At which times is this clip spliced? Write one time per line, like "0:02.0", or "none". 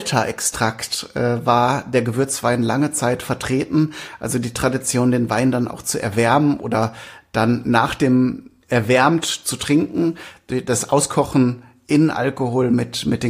0:08.6